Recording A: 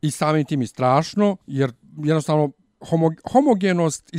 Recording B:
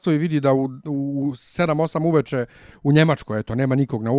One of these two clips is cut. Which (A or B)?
A